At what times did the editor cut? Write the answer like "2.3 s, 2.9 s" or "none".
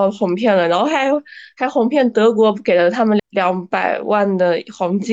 3.2 s